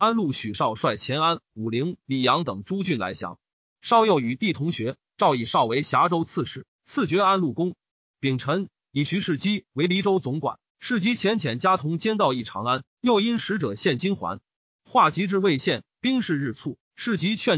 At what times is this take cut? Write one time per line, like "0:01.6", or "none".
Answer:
0:10.7

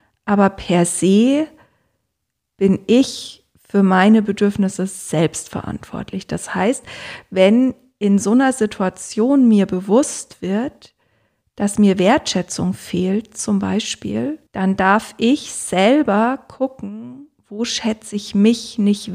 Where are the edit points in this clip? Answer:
0:14.5

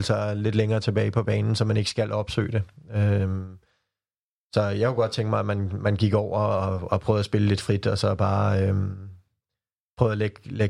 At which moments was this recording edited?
none

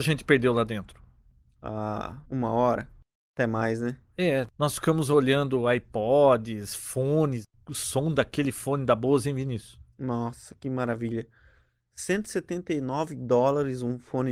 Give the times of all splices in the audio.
0:02.3

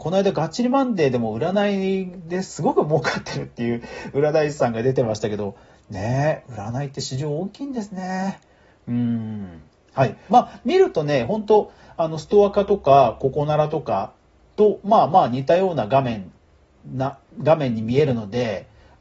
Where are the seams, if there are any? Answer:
0:10.3

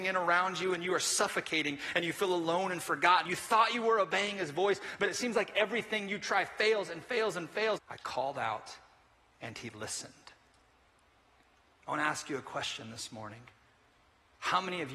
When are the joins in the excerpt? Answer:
0:03.3
0:07.8

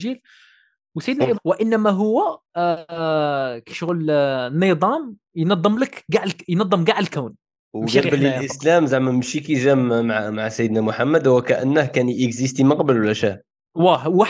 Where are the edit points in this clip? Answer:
0:01.4

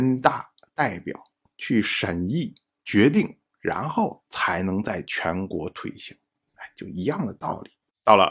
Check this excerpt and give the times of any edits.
none

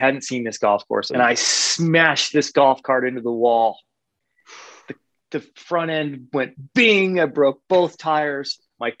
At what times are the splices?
0:01.1

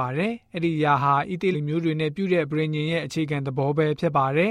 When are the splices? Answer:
0:01.5

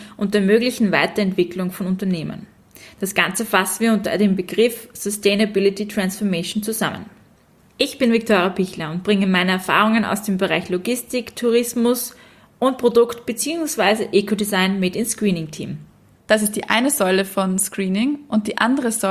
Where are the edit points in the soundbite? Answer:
0:16.1

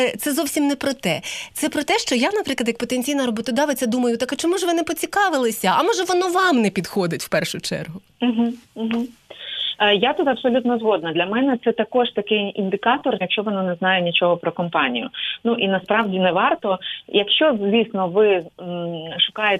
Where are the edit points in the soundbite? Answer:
0:13.2

